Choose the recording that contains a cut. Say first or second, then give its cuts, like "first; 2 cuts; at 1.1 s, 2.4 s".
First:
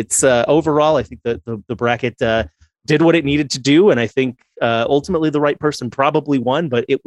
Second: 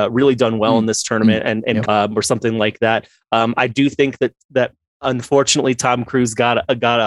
second; 1 cut; at 1.9 s